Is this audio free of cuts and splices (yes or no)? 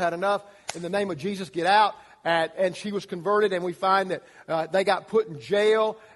yes